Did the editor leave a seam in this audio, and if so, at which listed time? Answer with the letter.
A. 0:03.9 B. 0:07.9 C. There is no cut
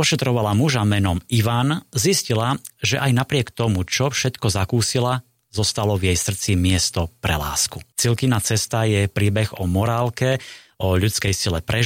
B